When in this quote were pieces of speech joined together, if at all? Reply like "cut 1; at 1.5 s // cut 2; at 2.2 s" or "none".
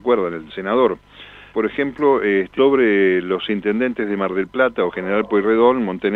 cut 1; at 1.5 s // cut 2; at 2.6 s